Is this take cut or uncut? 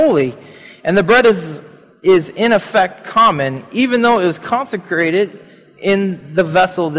uncut